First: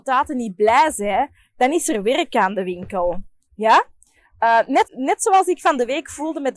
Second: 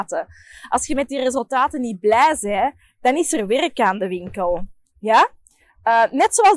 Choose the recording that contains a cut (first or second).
first